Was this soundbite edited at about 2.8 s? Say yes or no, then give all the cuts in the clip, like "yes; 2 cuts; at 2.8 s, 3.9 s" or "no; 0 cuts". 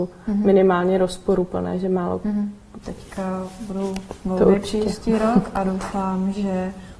yes; 1 cut; at 2.8 s